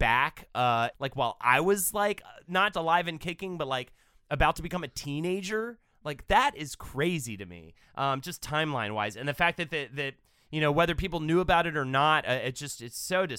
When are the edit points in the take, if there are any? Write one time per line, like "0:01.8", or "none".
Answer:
0:00.9
0:02.7